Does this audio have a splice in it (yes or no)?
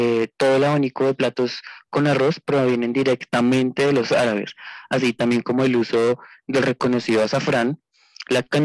no